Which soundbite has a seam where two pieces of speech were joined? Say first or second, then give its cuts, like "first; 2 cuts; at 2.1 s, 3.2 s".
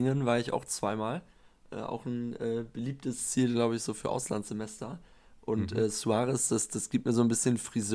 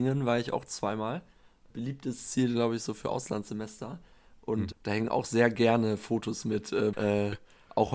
second; 3 cuts; at 1.7 s, 4.7 s, 6.9 s